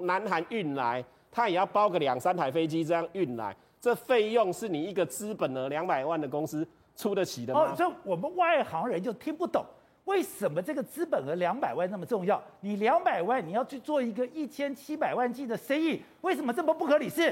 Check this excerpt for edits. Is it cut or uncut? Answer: uncut